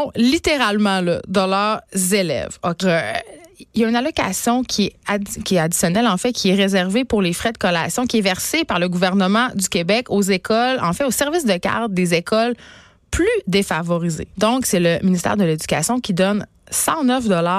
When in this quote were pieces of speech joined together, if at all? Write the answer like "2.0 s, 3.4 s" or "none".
2.8 s, 14.3 s